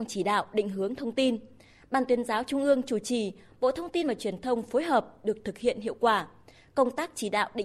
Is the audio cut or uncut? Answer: uncut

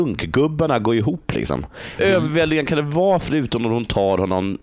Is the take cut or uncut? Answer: cut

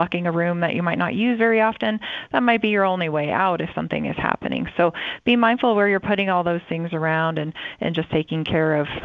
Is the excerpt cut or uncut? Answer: uncut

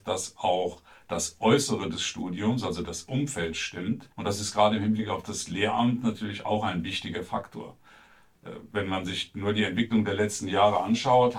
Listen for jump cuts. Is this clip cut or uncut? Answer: cut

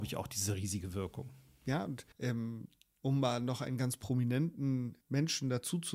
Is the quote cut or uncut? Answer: cut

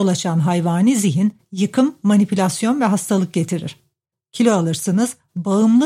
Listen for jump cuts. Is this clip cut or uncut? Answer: cut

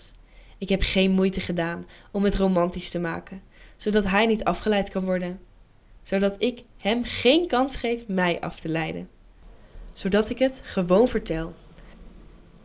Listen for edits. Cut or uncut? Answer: uncut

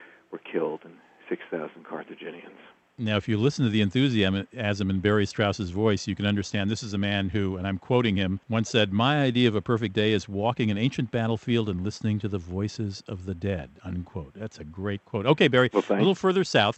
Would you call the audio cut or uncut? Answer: cut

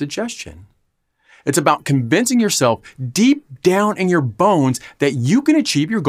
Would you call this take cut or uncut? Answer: uncut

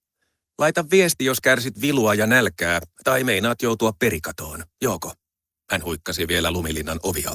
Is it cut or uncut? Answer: uncut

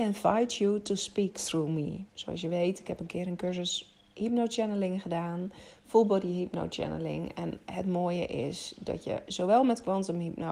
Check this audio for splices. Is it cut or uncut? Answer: cut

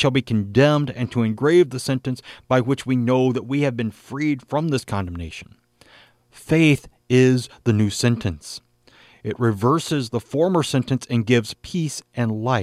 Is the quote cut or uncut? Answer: uncut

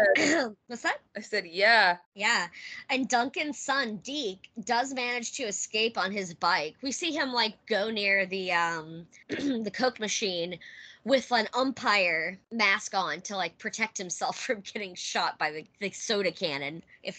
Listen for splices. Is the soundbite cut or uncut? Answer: uncut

